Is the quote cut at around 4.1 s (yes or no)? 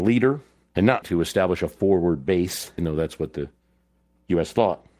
no